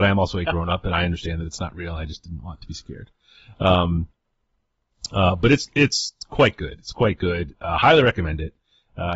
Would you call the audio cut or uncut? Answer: uncut